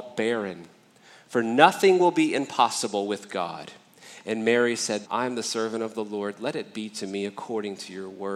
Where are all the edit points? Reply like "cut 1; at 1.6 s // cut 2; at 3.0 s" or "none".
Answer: cut 1; at 5.0 s